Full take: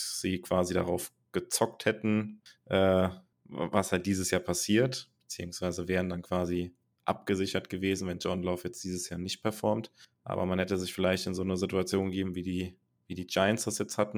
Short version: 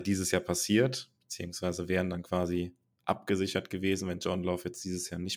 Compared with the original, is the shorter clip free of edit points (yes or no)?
yes